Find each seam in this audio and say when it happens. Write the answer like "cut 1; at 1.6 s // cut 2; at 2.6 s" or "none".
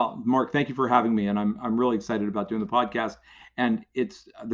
none